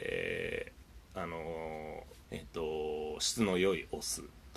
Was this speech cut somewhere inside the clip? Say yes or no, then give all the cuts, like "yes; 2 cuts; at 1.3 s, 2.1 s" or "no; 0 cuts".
yes; 2 cuts; at 1.1 s, 2.2 s